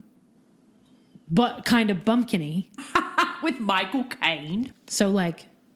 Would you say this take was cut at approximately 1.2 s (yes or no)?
no